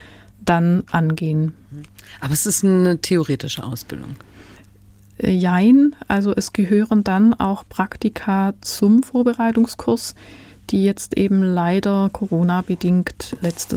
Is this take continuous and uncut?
yes; 0 cuts

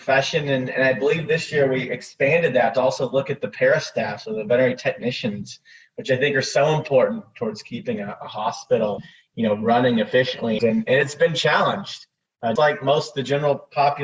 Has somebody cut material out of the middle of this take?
yes; 2 cuts; at 10.6 s, 12.6 s

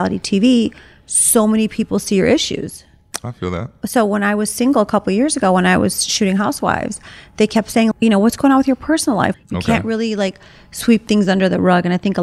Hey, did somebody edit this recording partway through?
yes; 2 cuts; at 7.9 s, 9.3 s

